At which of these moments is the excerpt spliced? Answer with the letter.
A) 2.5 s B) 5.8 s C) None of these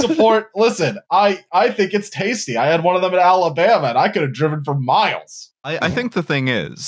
B